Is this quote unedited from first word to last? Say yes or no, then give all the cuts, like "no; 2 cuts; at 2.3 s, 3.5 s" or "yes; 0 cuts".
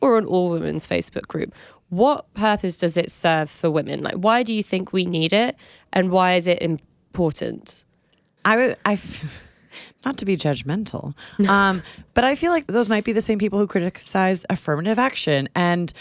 yes; 0 cuts